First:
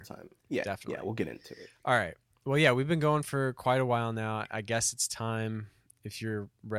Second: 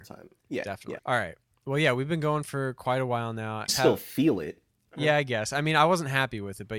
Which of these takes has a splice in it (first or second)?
second